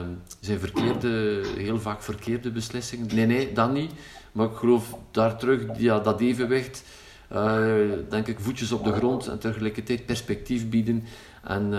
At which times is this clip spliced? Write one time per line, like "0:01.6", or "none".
0:03.1
0:08.1

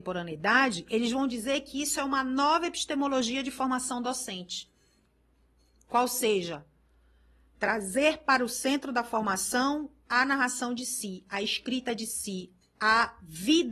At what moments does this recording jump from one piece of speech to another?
none

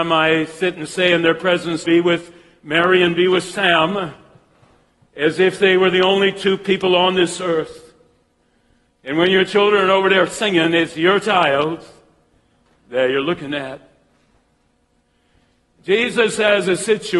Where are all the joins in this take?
0:01.8
0:08.9

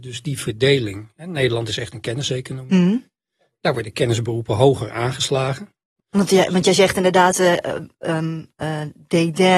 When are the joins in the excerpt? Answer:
0:06.0

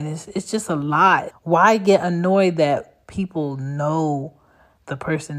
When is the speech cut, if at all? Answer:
0:01.3

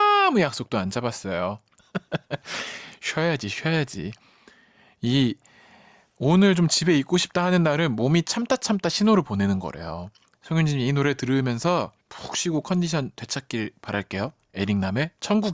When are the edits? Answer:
0:01.8
0:10.3
0:12.0

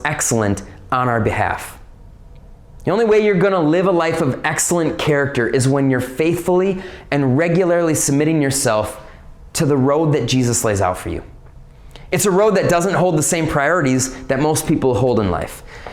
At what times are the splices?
none

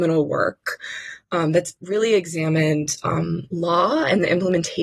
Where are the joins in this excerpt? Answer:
none

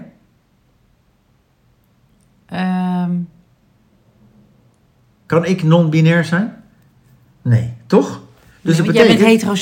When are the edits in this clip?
none

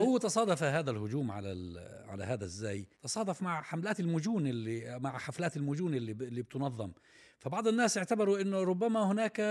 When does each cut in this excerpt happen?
0:02.9

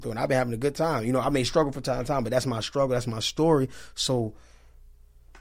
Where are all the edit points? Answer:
none

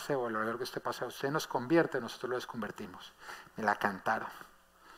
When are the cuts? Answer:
none

